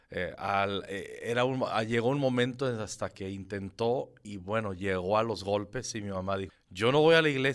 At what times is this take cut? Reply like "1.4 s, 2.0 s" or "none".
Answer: 4.2 s, 6.5 s